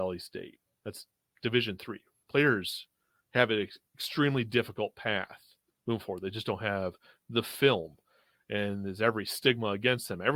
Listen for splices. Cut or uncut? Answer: uncut